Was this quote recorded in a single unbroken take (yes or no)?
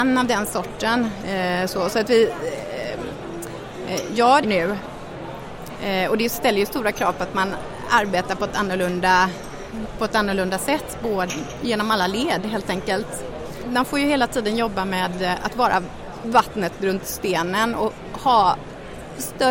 no